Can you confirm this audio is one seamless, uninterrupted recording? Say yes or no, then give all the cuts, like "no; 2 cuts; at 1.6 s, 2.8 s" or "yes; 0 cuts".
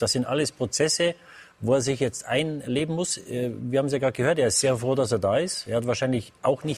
yes; 0 cuts